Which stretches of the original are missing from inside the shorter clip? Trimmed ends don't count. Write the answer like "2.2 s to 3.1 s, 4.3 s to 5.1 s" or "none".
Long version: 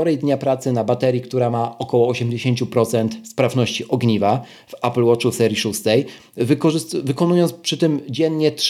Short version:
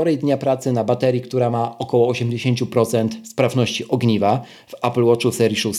none